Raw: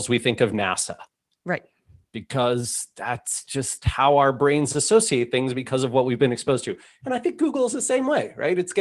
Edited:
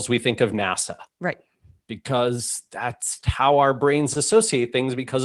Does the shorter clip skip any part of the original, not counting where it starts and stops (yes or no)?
yes